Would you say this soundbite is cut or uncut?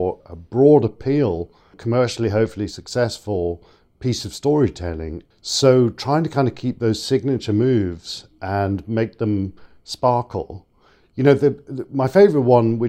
uncut